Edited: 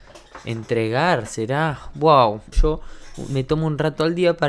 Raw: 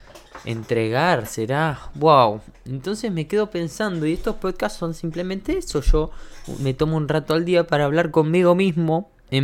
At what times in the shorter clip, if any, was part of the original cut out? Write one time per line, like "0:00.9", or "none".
0:02.5